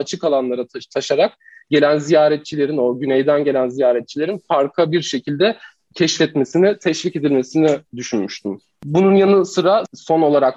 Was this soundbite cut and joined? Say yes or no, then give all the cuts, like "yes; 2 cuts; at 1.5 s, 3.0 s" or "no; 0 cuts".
yes; 1 cut; at 7.9 s